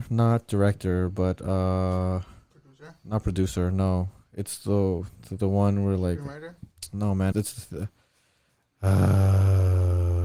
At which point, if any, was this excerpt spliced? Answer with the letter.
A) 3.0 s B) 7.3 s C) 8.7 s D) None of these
B